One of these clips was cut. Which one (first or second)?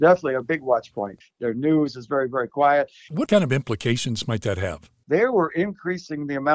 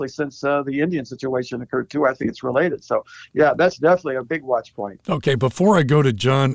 first